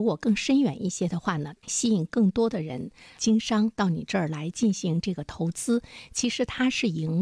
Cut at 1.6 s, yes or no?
yes